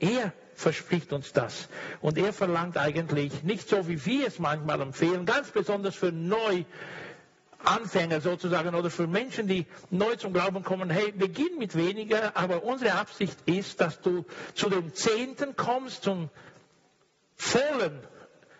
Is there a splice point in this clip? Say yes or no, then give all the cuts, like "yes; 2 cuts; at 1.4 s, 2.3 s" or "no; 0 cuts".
no; 0 cuts